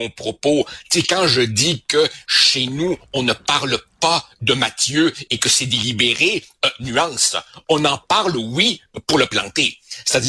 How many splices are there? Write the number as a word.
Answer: zero